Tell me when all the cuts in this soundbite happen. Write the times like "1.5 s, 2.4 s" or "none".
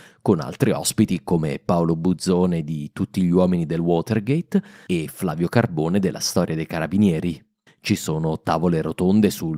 7.7 s